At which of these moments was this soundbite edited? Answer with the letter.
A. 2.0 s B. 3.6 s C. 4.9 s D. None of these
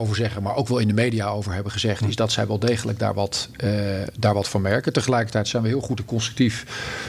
D